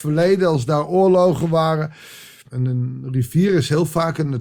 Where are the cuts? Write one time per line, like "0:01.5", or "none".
0:02.5